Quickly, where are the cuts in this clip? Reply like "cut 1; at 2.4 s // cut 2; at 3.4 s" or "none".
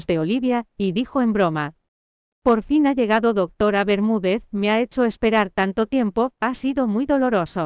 none